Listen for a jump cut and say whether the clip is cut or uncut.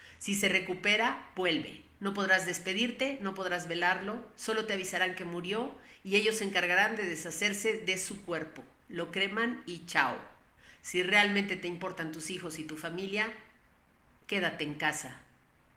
cut